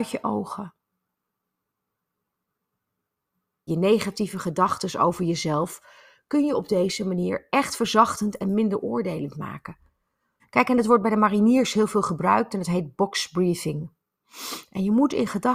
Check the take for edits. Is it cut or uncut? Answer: cut